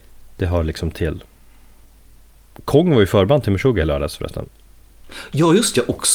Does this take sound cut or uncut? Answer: uncut